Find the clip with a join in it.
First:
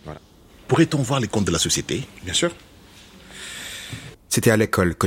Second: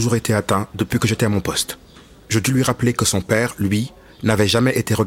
first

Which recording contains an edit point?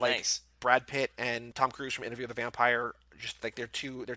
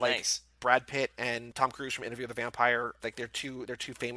second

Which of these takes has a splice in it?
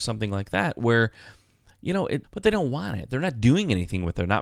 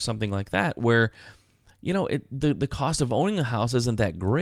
first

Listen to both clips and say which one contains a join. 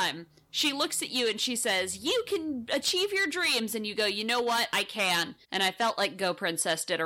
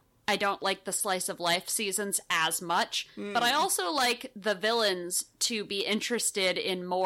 first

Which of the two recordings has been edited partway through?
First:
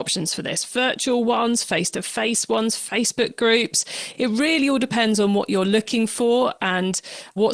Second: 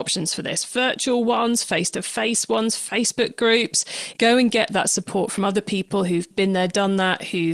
second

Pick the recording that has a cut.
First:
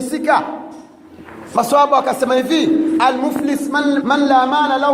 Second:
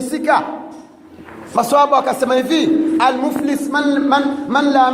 first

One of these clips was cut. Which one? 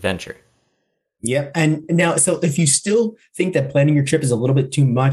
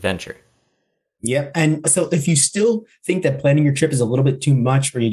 second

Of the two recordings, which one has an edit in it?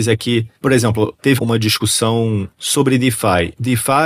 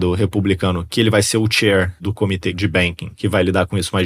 first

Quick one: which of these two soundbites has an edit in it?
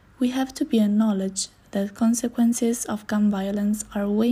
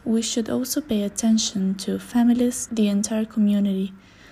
second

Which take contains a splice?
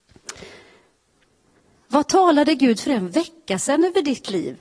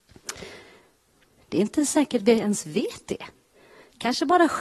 second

